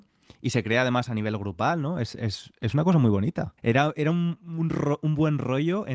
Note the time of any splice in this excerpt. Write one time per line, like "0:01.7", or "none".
0:03.6